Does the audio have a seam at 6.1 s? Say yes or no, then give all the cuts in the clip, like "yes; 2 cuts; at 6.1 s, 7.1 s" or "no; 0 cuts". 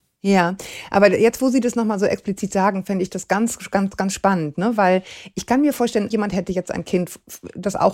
yes; 1 cut; at 6.1 s